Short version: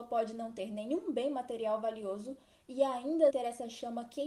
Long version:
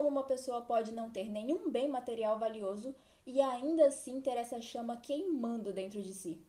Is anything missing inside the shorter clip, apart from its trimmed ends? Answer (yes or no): yes